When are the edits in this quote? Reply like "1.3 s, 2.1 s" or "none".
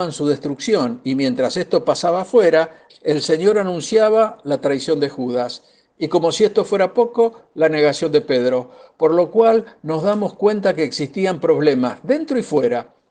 2.9 s